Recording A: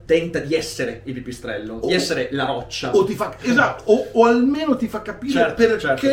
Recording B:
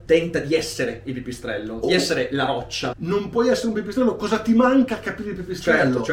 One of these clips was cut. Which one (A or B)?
B